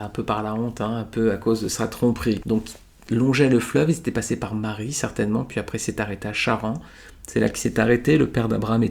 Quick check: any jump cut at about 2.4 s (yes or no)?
yes